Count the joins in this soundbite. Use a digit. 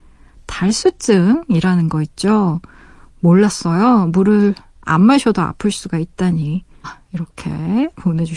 1